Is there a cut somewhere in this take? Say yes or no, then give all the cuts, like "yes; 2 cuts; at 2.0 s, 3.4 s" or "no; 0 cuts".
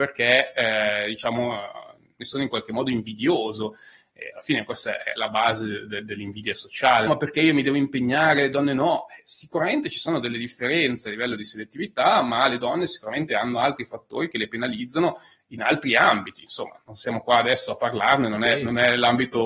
yes; 1 cut; at 7.1 s